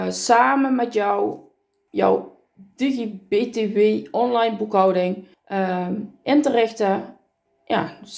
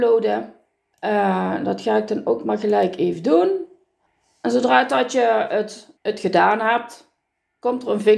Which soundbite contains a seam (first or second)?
second